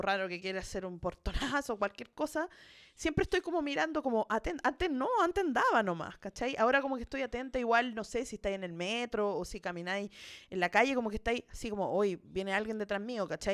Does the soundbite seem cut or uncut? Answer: uncut